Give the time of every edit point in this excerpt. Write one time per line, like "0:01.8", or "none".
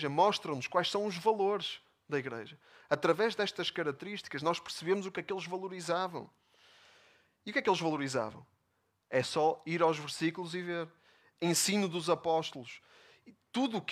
0:05.1